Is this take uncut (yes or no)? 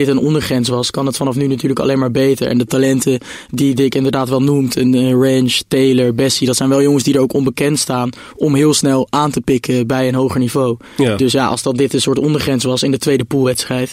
yes